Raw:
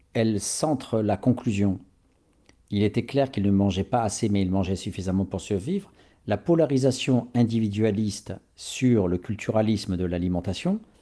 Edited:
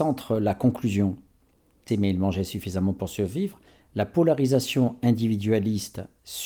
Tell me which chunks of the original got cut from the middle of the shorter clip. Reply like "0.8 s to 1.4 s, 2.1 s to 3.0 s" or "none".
2.5 s to 4.2 s